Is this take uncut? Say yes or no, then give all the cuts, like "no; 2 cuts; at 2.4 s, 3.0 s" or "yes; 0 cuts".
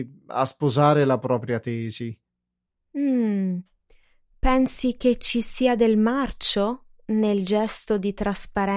yes; 0 cuts